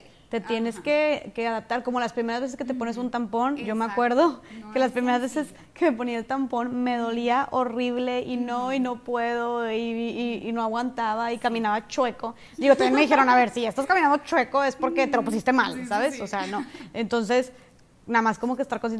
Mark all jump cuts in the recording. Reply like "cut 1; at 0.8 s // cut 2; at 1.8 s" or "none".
none

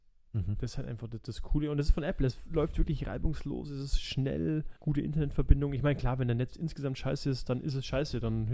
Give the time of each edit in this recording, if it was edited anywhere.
cut 1; at 4.8 s

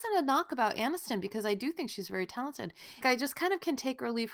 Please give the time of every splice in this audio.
cut 1; at 3.0 s

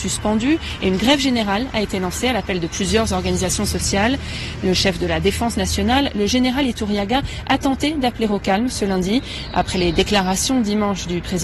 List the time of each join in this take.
none

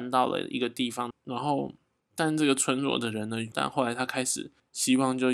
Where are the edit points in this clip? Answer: cut 1; at 1.1 s // cut 2; at 3.5 s

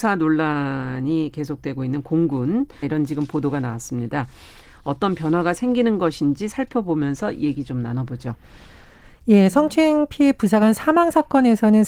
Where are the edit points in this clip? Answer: cut 1; at 2.8 s

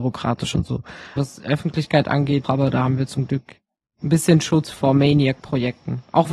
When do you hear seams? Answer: cut 1; at 1.2 s // cut 2; at 2.4 s

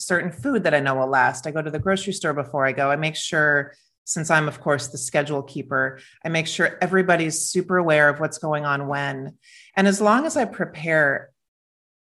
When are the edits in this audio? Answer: none

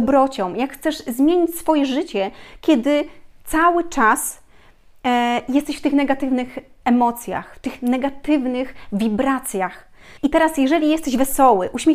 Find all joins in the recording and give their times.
cut 1; at 10.2 s

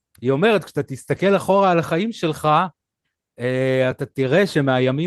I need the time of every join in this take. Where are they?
cut 1; at 3.9 s

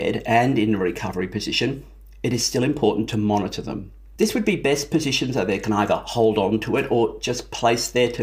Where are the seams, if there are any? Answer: cut 1; at 4.2 s

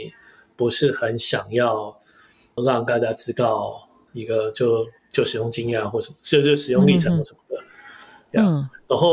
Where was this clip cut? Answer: cut 1; at 2.6 s

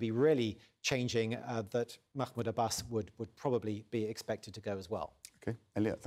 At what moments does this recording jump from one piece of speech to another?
none

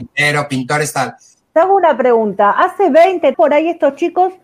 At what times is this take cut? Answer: cut 1; at 1.4 s // cut 2; at 3.3 s

